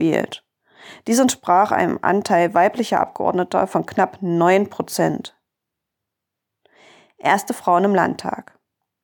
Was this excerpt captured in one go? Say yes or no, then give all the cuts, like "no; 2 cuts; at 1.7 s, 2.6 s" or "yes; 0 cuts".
yes; 0 cuts